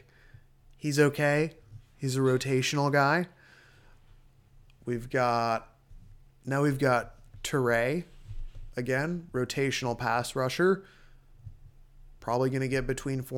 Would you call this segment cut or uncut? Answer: uncut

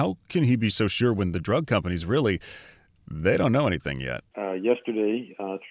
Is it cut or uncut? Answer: cut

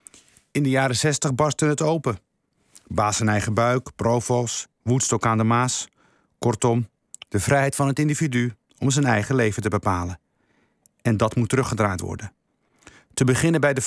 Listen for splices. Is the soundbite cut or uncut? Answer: uncut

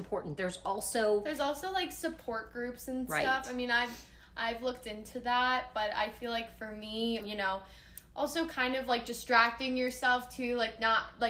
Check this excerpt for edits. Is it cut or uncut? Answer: cut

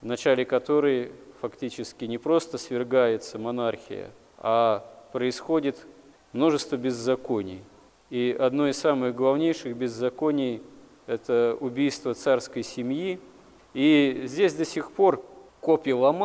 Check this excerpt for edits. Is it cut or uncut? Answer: uncut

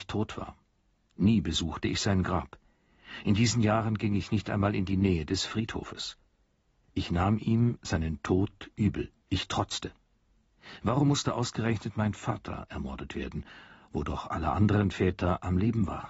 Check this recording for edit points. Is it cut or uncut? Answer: cut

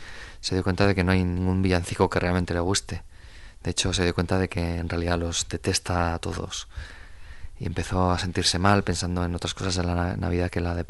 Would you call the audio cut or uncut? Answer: uncut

